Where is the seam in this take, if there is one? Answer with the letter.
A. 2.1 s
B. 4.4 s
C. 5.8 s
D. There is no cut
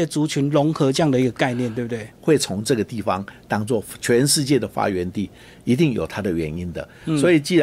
A